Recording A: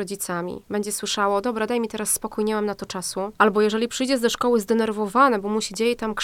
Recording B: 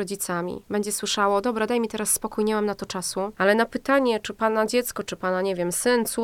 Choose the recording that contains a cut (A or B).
B